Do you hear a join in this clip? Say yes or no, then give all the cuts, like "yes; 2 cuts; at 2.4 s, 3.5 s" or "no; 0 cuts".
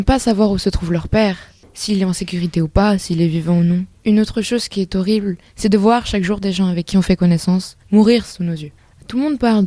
no; 0 cuts